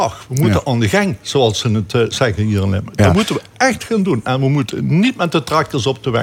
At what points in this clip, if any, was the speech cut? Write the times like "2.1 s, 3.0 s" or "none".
none